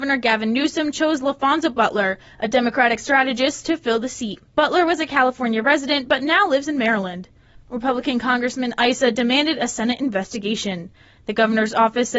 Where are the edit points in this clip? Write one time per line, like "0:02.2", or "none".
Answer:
none

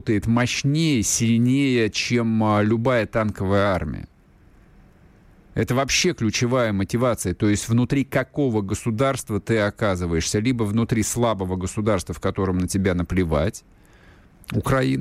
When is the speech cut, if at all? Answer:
none

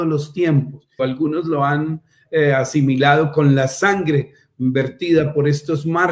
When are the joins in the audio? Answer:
0:01.0

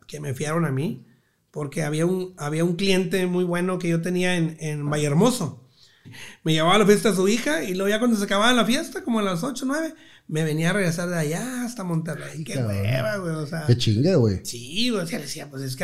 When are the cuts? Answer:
0:06.0

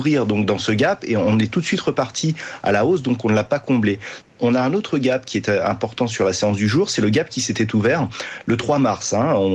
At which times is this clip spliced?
0:04.2

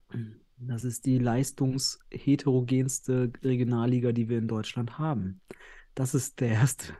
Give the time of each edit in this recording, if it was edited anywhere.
none

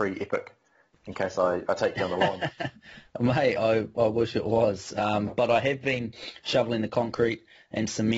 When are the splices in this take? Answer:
none

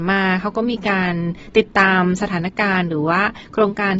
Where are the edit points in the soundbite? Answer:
none

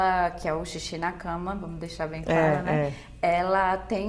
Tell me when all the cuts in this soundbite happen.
none

